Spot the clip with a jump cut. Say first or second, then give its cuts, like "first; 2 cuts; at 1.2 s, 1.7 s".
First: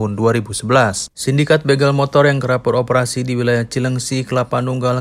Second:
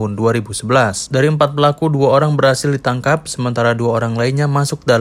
first; 1 cut; at 1.1 s